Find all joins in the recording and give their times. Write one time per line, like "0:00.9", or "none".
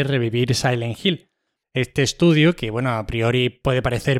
0:01.6